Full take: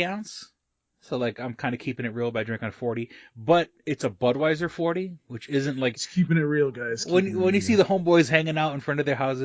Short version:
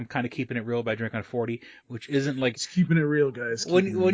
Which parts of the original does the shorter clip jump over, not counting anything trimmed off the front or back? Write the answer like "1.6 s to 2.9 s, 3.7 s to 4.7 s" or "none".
3.3 s to 5.2 s